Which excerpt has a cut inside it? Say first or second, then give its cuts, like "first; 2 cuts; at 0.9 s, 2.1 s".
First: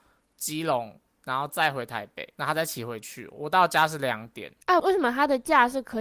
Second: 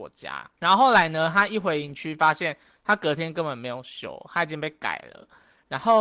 first; 1 cut; at 4.8 s